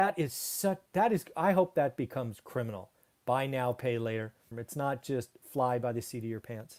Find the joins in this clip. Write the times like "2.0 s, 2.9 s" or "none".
4.5 s